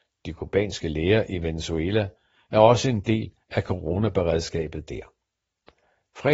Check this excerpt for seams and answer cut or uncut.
uncut